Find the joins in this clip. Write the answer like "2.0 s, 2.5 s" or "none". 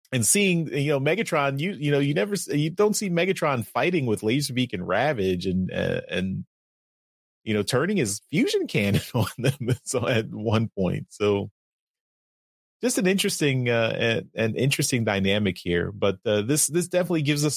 none